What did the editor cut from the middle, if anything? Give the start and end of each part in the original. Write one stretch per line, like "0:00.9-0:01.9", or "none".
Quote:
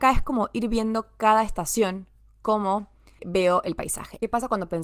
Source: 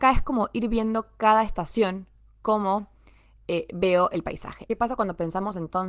0:03.2-0:03.7